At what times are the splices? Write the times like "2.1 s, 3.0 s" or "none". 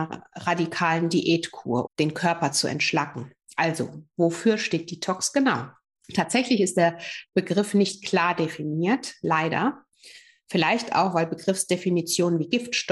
1.9 s